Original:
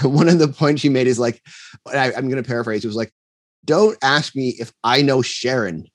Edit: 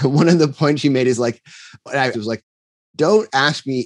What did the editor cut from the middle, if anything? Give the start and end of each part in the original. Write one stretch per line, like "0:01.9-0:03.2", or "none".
0:02.1-0:02.8